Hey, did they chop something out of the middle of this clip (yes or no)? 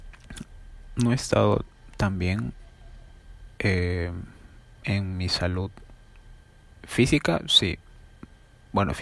no